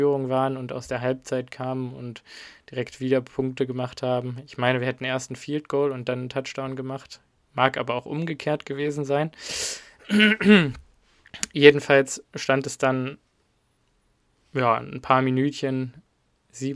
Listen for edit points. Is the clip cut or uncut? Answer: uncut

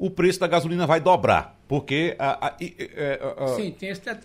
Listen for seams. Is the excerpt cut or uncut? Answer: uncut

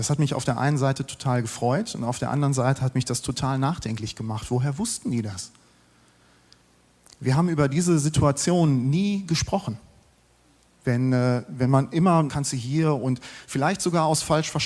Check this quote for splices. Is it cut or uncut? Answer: cut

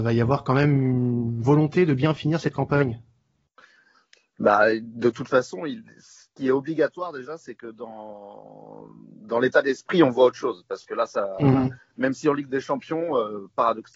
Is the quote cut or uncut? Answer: uncut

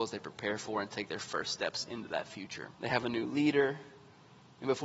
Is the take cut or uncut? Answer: cut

